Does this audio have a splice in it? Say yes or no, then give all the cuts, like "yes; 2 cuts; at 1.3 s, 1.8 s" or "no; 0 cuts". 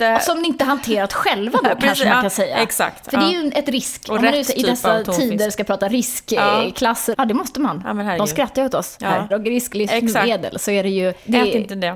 yes; 2 cuts; at 7.1 s, 9.3 s